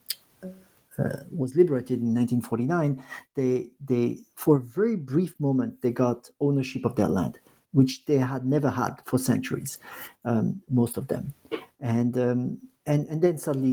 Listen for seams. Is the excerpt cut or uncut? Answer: uncut